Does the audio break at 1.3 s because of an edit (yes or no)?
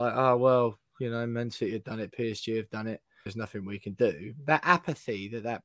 no